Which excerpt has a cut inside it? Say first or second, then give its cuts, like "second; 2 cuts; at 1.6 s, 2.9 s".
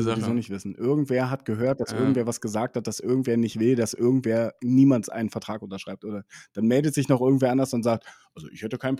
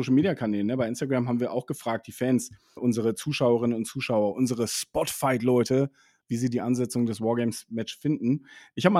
second; 2 cuts; at 2.8 s, 6.2 s